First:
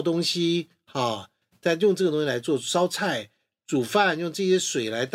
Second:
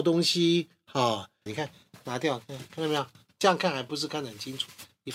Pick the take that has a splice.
second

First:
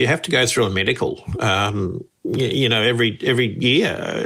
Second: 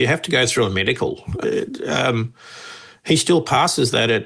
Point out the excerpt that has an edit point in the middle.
second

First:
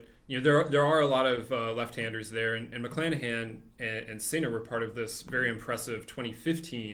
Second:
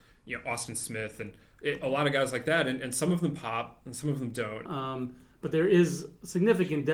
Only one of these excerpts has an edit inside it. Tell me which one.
second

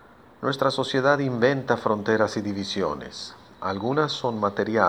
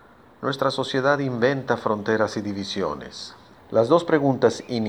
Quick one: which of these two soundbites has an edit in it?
second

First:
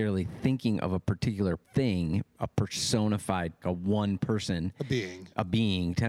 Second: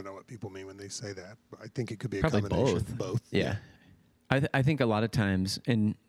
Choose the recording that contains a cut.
first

